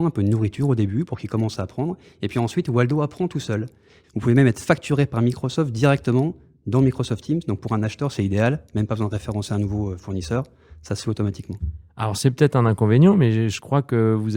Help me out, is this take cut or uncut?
cut